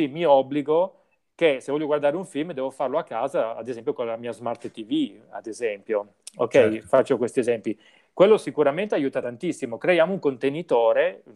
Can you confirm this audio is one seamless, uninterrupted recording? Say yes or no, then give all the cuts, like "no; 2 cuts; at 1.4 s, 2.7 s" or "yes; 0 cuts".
yes; 0 cuts